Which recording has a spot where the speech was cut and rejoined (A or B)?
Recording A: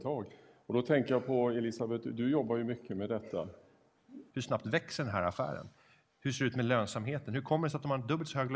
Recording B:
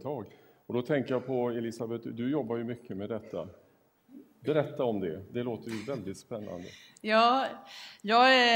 A